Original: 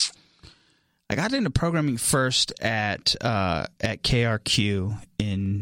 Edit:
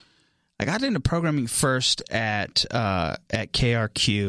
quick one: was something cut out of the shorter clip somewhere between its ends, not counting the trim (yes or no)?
no